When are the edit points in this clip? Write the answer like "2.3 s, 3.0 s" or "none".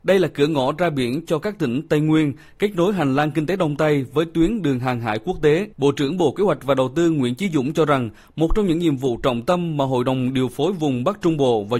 5.7 s